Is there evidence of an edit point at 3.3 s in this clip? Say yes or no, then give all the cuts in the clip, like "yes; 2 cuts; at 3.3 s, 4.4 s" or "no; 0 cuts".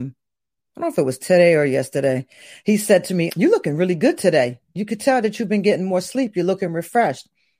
yes; 1 cut; at 3.3 s